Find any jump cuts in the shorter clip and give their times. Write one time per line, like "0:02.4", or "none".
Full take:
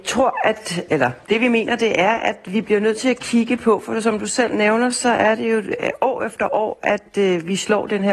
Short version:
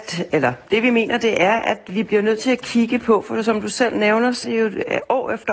0:04.4

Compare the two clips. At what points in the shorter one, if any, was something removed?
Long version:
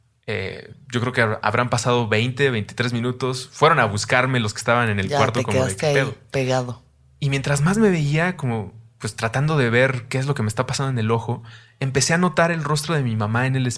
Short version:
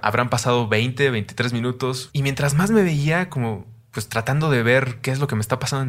0:02.1

